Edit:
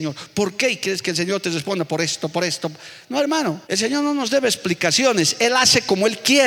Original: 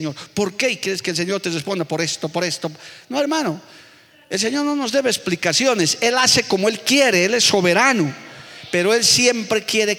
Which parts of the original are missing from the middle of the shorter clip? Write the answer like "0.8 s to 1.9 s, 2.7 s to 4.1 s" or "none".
3.6 s to 4.3 s